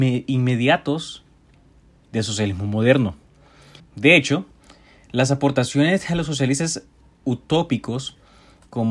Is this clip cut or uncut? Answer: cut